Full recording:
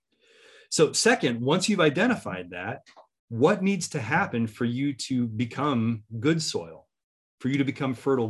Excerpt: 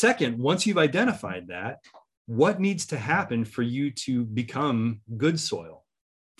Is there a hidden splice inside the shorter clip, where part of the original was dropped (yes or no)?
no